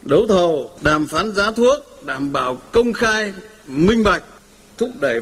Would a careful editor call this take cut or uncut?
uncut